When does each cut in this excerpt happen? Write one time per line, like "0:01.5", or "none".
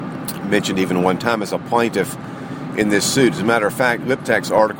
none